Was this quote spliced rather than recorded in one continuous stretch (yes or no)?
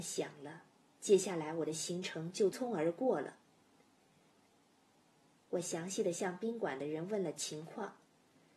yes